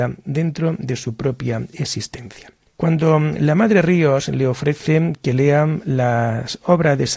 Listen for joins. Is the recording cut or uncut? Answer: uncut